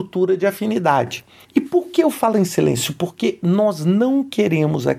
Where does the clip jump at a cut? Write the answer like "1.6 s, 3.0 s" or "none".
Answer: none

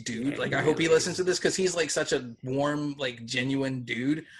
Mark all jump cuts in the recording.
none

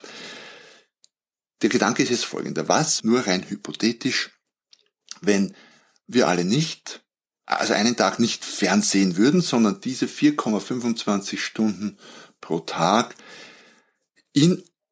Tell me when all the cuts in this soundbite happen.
3.0 s

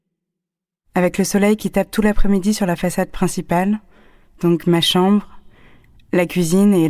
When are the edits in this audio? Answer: none

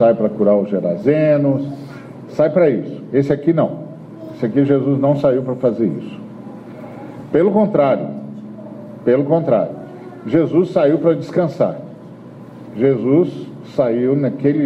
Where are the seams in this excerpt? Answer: none

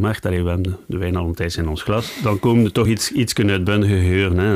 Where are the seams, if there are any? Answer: none

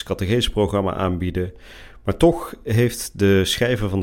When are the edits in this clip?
none

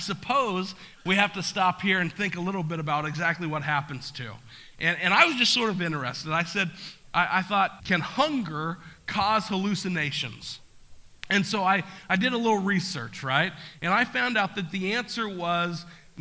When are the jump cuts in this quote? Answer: 7.8 s

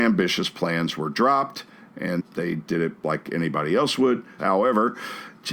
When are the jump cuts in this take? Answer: 2.2 s, 4.4 s

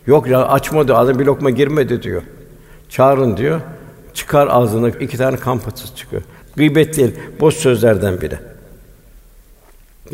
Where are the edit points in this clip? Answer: 4.9 s, 6.4 s

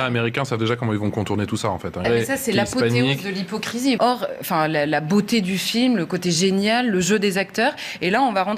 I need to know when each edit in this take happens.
2.0 s, 4.0 s

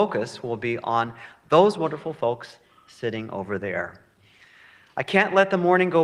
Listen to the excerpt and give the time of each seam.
none

